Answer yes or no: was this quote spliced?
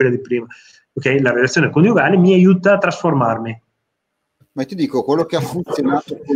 yes